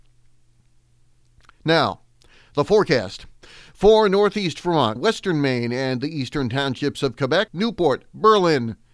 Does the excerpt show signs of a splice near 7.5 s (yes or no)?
yes